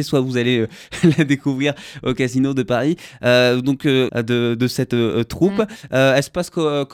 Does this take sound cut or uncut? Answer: cut